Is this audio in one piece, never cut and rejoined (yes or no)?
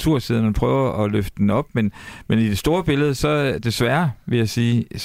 yes